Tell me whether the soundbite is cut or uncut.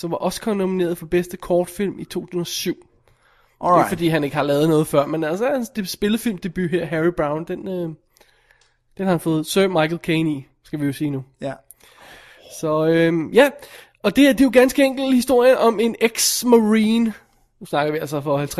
uncut